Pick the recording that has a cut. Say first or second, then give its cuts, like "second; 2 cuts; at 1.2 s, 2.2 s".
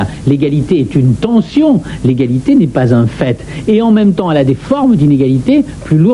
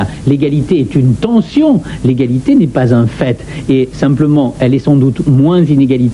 first; 1 cut; at 3.7 s